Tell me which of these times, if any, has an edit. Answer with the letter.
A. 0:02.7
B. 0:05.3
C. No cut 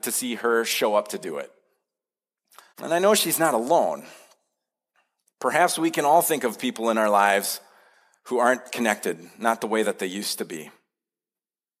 A